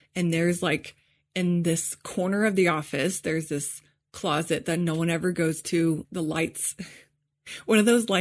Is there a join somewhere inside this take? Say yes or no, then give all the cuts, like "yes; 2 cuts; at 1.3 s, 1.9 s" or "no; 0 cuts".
yes; 1 cut; at 6.0 s